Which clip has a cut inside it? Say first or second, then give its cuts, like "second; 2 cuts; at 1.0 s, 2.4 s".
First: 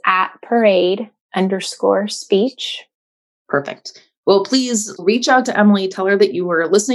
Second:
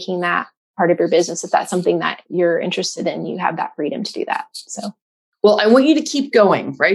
first; 2 cuts; at 3.4 s, 5.0 s